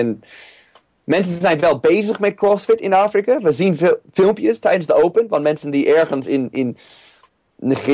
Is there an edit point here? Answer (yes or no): no